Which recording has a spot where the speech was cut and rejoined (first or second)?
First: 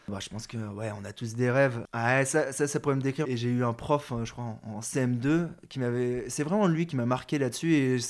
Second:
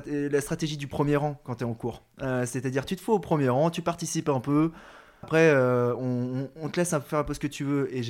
first